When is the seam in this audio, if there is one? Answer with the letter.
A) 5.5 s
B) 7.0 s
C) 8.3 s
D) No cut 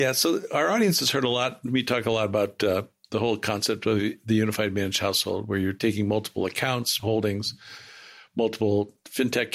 B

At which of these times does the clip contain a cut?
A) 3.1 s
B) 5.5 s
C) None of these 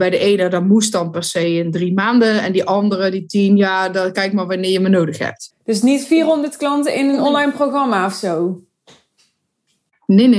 B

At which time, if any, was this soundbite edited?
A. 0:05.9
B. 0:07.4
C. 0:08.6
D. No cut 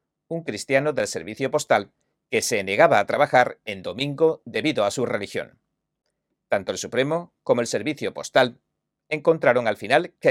B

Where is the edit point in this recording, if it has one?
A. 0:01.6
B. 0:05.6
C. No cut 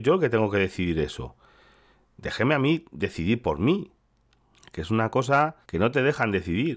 B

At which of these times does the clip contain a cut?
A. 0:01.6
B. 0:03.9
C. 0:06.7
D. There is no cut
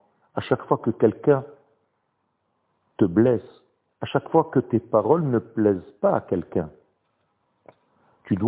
D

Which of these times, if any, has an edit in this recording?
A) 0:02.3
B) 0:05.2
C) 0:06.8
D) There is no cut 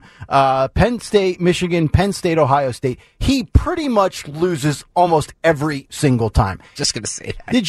C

